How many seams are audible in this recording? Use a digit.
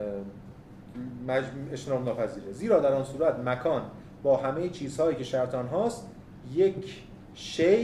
0